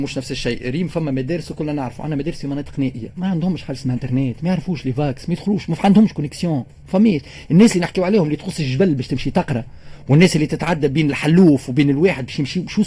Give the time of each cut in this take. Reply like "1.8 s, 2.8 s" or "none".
none